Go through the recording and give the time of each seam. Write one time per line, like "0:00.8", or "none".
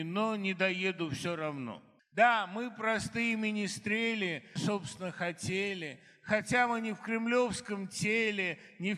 0:02.0
0:04.6